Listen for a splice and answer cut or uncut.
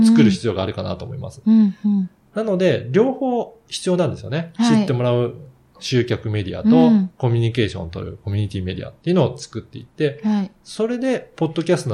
uncut